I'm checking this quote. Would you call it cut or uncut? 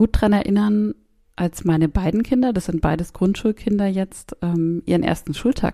uncut